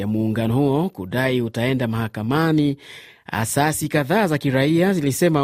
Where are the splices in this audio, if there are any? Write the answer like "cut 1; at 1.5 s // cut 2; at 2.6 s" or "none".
none

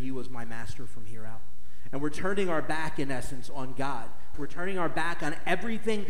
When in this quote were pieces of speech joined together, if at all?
cut 1; at 4.3 s

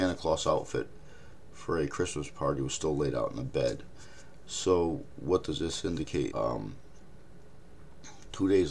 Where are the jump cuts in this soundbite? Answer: cut 1; at 6.3 s

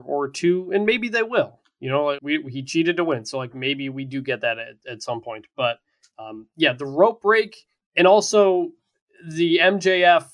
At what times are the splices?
cut 1; at 2.2 s

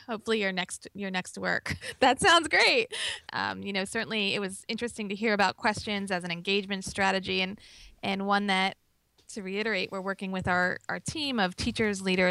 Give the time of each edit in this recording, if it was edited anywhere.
cut 1; at 1.8 s // cut 2; at 3.3 s

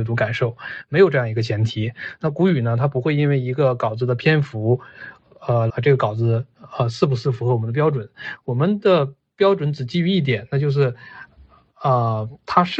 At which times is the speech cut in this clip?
cut 1; at 5.7 s

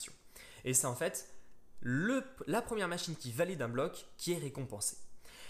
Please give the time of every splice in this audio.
none

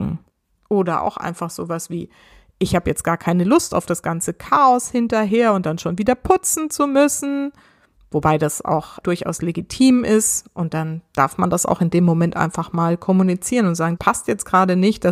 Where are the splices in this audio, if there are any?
cut 1; at 9.0 s // cut 2; at 14.0 s

